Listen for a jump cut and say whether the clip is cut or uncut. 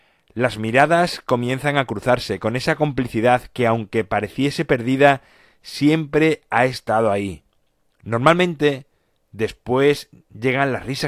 uncut